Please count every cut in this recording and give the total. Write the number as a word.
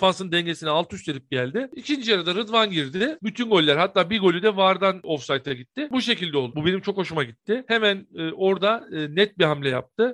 one